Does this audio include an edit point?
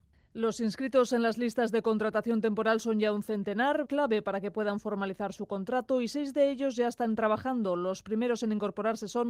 yes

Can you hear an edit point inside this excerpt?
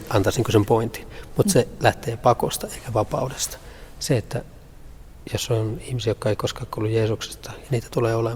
no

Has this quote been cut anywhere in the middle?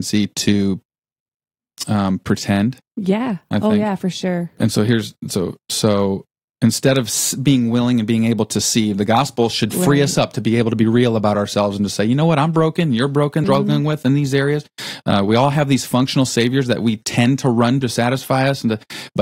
yes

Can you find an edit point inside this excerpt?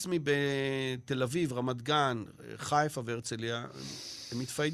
no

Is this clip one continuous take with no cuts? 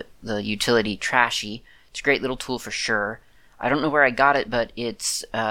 yes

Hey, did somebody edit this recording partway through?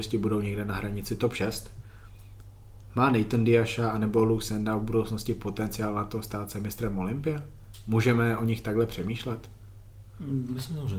no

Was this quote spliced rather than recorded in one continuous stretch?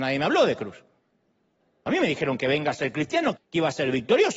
yes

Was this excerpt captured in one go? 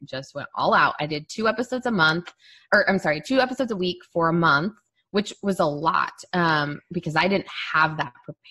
yes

